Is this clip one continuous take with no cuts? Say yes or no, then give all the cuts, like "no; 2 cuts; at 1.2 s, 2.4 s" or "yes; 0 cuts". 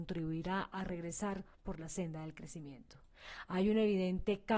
no; 1 cut; at 3.5 s